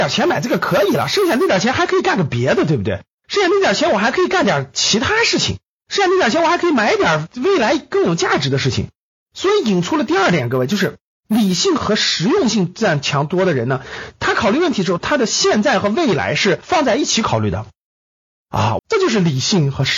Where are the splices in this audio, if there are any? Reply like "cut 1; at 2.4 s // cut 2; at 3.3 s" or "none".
cut 1; at 18.8 s